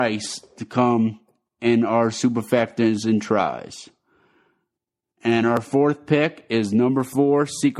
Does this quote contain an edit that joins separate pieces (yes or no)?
no